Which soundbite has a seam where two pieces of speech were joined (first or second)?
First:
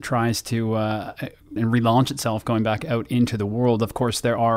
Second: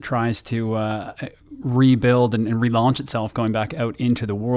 first